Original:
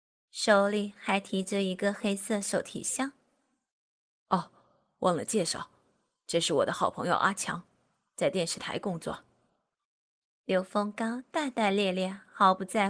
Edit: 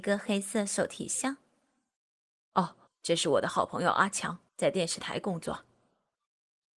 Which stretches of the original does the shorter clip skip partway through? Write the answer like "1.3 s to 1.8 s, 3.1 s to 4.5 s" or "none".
4.6 s to 6.1 s, 7.7 s to 8.1 s

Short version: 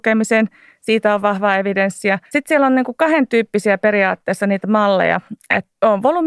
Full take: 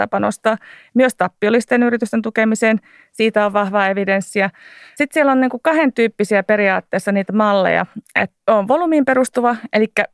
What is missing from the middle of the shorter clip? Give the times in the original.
4.6 s to 4.9 s

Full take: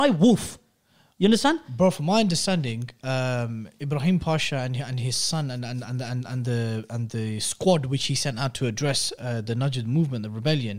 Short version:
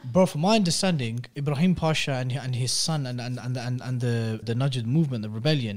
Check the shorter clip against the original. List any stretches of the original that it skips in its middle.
3.0 s to 3.8 s, 6.9 s to 9.4 s

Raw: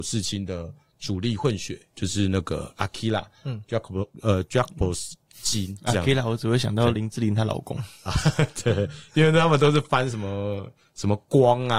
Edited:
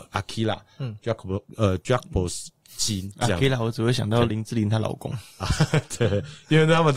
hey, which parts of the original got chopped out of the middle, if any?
none

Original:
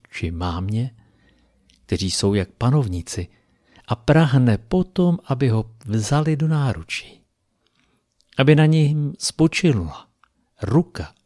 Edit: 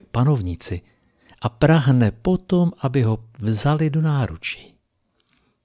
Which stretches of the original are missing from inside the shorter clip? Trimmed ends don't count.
none

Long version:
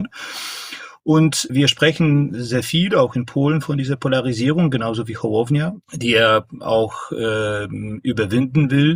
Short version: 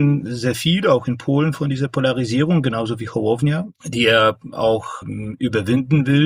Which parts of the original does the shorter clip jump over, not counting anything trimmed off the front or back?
7.1 s to 7.7 s

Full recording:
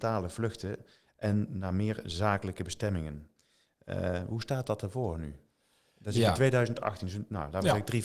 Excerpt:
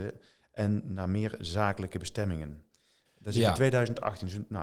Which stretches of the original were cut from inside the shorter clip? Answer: 3.7 s to 5.9 s

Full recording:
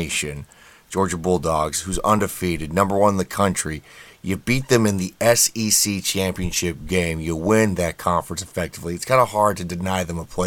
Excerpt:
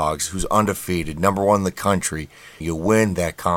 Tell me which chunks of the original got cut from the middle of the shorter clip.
4.1 s to 7.2 s

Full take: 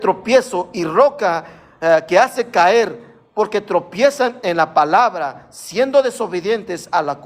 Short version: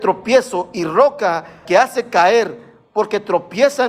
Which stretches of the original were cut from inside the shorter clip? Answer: 1.7 s to 2.1 s

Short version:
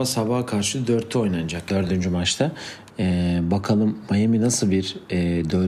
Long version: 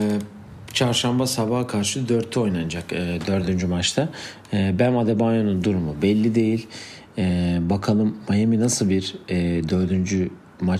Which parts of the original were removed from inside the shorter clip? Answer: 2.9 s to 3.3 s, 4.5 s to 7.1 s

